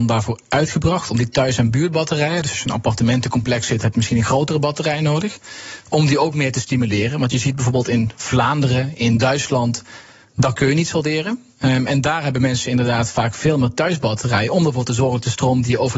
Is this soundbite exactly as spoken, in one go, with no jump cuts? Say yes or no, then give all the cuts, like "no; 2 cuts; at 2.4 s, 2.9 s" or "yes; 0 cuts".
yes; 0 cuts